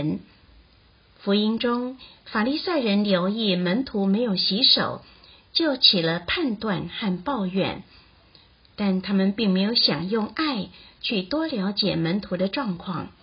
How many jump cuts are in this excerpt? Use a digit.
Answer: 0